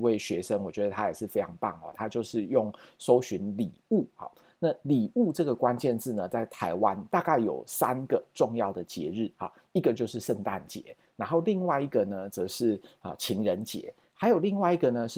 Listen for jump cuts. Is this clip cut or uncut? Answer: uncut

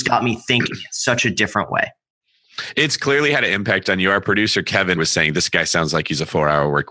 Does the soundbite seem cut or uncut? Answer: cut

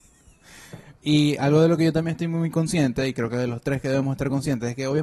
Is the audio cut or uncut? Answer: cut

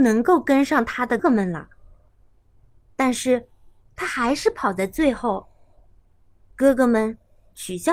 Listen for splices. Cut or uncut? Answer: cut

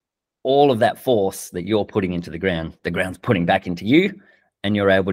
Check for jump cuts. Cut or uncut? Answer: uncut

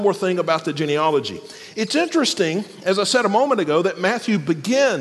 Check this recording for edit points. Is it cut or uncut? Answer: uncut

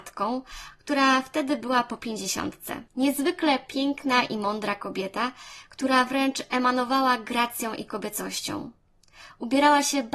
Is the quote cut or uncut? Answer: cut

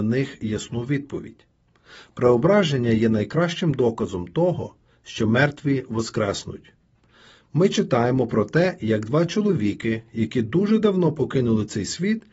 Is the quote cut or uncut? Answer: uncut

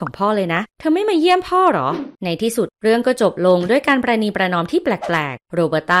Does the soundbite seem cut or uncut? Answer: cut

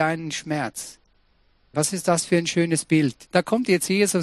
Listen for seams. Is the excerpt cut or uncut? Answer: cut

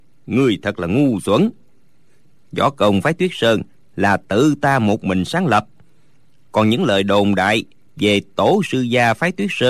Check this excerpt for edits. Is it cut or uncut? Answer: uncut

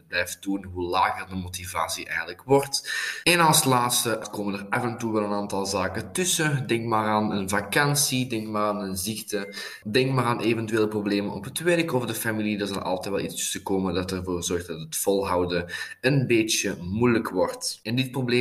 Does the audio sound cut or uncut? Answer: uncut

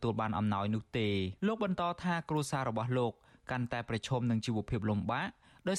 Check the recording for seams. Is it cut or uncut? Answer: cut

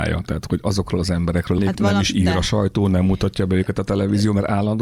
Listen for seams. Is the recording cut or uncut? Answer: cut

